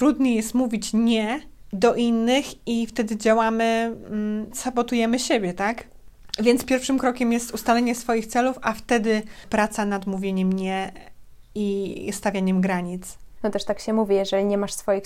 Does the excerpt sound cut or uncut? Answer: cut